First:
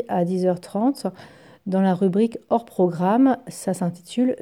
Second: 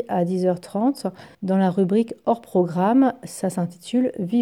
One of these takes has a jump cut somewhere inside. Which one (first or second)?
second